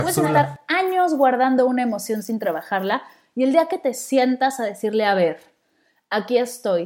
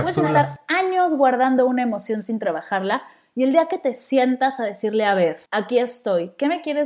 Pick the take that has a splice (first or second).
second